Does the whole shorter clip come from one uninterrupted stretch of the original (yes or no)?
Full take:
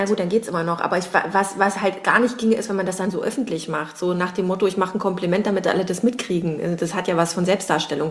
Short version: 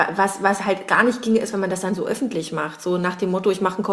yes